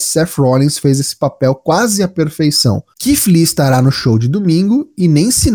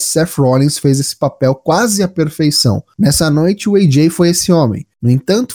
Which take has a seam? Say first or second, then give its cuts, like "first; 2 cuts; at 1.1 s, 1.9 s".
first; 1 cut; at 2.9 s